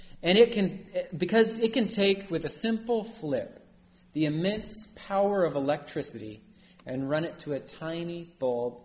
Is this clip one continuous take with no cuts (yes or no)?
yes